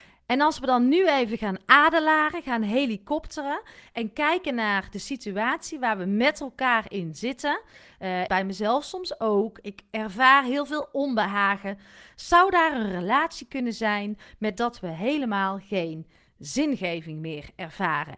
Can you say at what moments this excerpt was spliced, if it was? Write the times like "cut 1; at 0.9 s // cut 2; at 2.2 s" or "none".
cut 1; at 8.3 s